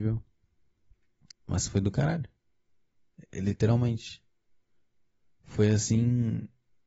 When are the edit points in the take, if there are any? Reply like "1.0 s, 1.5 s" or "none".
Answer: 1.3 s